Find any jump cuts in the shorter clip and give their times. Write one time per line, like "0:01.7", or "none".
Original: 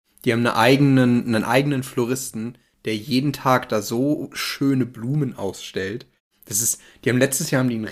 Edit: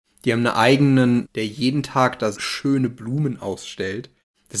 0:01.2
0:02.3